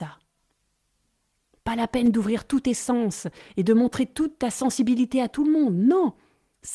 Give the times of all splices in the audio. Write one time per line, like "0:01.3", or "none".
none